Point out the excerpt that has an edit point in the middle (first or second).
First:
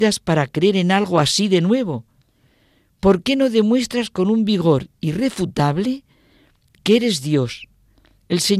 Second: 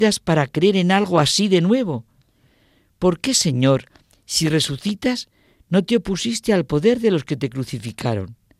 first